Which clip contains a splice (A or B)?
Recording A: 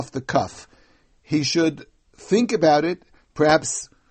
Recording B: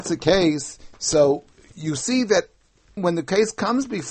B